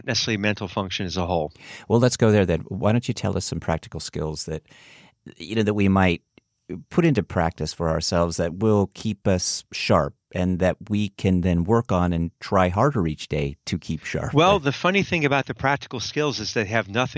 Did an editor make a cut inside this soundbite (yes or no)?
no